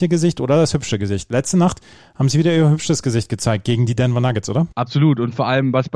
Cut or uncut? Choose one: cut